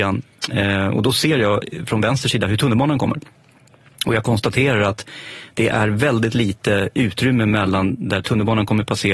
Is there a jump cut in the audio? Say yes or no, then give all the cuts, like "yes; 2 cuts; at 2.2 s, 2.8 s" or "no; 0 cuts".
no; 0 cuts